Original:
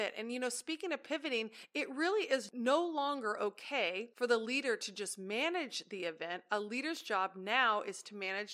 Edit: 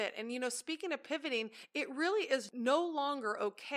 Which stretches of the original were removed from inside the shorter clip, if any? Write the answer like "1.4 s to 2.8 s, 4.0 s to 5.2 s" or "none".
none

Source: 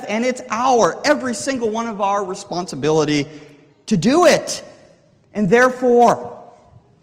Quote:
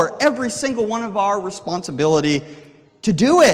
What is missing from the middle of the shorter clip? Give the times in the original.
none

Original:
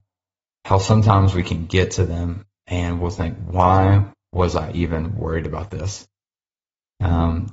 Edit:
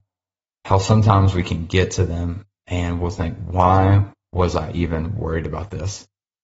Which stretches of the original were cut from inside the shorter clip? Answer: none

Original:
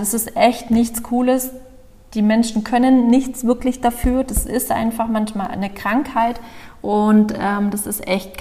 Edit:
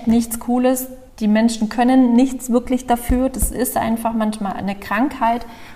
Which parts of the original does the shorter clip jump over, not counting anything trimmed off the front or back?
1.7 s to 2.0 s

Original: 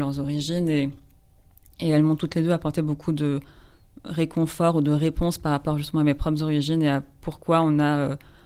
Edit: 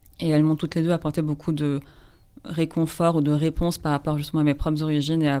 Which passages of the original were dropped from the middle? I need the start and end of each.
none

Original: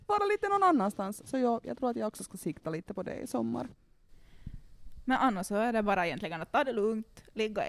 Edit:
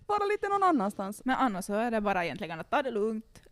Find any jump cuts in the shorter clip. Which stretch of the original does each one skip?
1.2 s to 5.0 s

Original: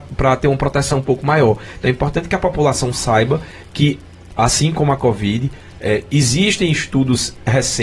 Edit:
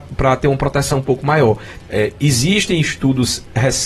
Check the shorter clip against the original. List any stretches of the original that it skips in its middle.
1.8 s to 5.7 s

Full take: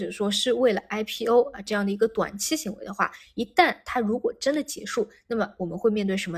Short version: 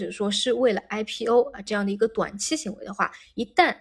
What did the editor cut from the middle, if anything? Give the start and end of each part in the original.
none

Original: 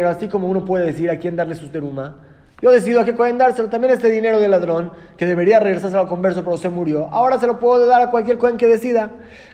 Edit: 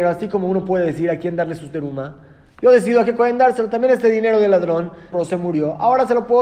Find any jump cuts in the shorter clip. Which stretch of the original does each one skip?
5.1 s to 6.4 s

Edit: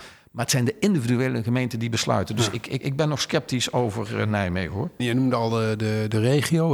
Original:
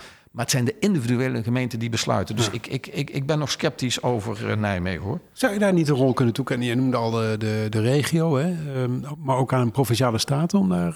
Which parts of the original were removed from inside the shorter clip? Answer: 2.8 s to 3.1 s, 5.3 s to 6.6 s

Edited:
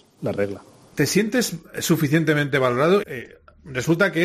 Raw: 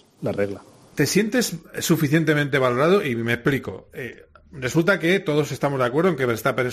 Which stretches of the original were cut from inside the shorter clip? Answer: 3.0 s to 3.9 s

